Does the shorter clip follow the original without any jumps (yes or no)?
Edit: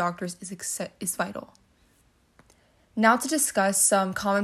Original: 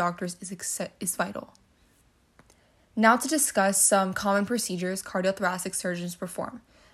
yes